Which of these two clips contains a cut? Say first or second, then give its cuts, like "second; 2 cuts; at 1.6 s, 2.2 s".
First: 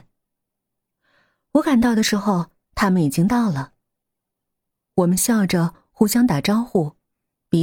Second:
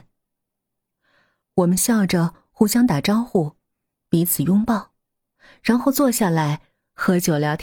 second; 1 cut; at 1.4 s